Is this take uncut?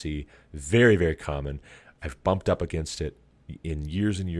yes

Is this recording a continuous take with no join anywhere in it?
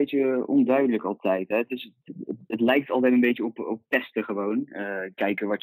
yes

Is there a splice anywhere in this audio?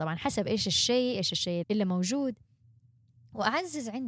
yes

